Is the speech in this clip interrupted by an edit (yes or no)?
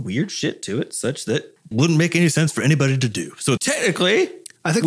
yes